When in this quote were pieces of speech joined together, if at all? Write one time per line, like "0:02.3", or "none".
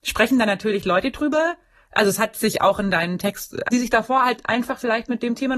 0:03.7

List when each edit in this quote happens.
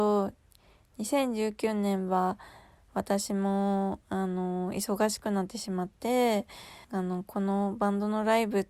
0:06.8

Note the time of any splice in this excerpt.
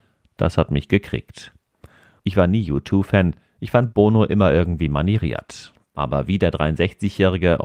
0:02.2

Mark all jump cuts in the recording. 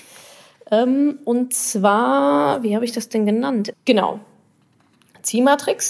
0:03.7

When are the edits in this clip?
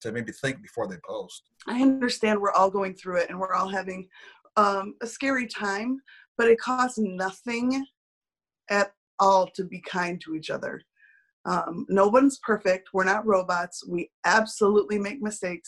none

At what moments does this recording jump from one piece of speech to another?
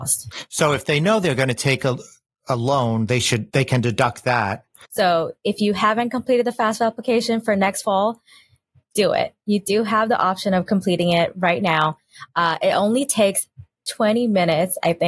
0:04.9

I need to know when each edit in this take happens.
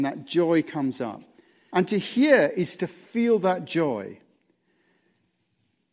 0:01.7

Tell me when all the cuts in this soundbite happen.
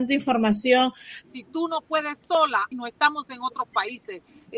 0:01.2
0:02.7

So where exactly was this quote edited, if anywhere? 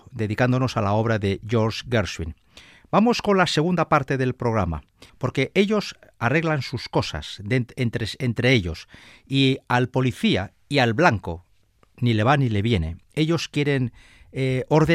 0:05.1

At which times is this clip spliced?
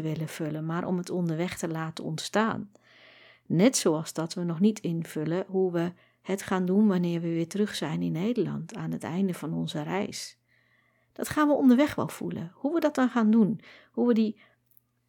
none

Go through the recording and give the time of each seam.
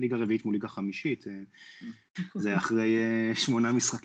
0:02.2

